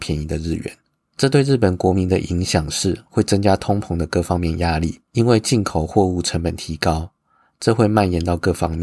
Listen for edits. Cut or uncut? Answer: cut